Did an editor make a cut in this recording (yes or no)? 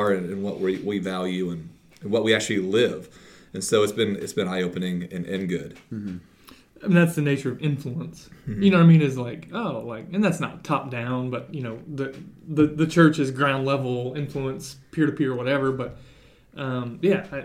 no